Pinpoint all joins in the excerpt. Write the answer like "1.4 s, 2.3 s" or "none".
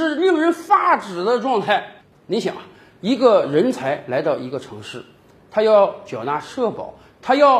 2.1 s, 5.4 s